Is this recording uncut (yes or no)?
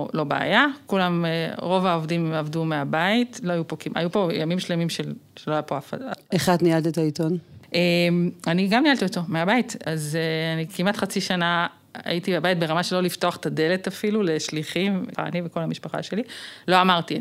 no